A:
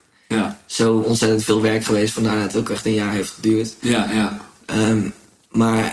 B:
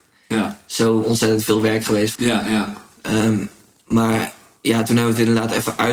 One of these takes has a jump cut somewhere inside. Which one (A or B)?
B